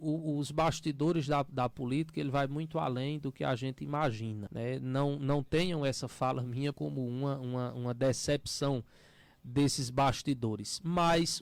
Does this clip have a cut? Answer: yes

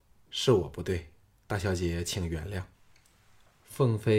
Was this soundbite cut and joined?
yes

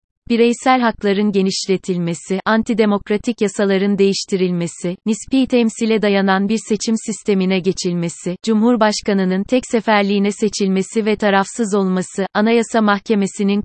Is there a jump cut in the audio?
no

